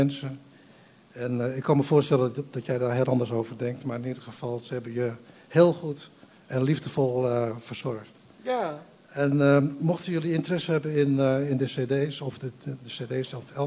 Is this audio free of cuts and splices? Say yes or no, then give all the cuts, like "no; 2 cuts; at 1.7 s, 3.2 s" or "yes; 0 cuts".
yes; 0 cuts